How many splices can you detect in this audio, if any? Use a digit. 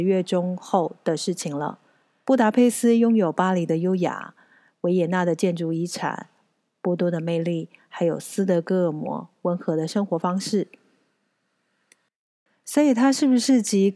1